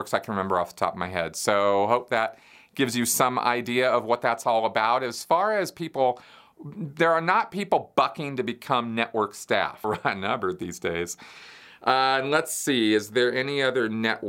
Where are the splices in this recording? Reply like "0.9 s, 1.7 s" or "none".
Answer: 9.8 s